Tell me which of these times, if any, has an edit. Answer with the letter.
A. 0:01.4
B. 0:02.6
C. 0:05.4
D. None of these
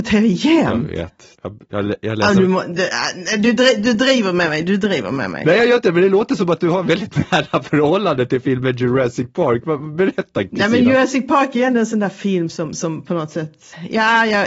A